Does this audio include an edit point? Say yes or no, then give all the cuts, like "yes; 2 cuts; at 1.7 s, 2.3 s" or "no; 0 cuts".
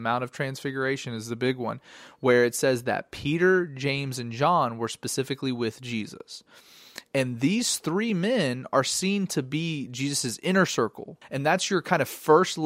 yes; 1 cut; at 11.2 s